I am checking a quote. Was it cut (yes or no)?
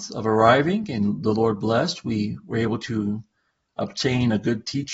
no